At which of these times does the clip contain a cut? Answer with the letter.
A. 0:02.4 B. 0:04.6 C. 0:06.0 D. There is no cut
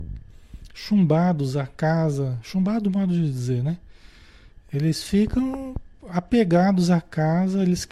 D